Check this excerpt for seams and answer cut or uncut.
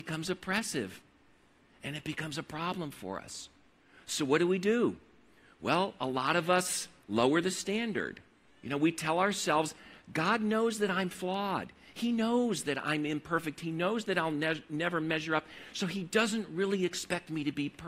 cut